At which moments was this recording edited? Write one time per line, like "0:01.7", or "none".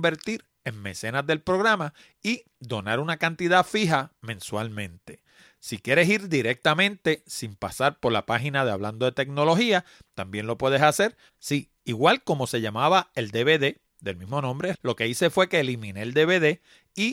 0:11.3
0:14.7